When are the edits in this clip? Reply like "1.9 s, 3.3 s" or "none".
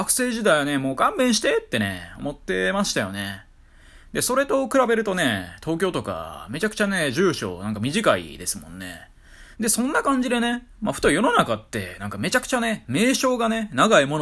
9.5 s